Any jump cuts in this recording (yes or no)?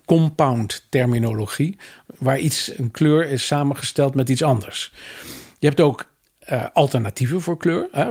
no